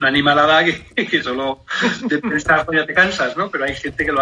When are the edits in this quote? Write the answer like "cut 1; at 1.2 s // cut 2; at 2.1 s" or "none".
none